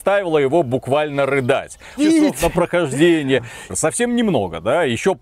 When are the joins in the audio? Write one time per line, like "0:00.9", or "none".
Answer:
0:02.0
0:03.7